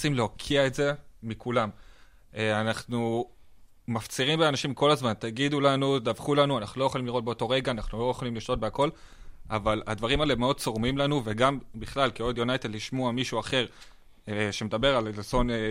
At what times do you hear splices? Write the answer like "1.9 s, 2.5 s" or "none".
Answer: none